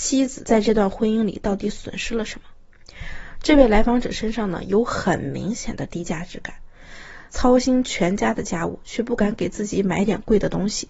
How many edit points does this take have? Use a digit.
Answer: 1